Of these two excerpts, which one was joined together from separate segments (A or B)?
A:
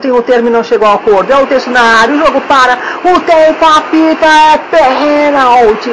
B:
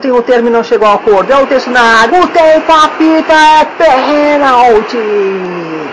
B